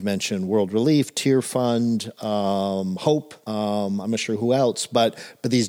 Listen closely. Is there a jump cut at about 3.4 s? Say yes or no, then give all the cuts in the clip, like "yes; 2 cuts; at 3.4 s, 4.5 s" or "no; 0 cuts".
yes; 1 cut; at 3.4 s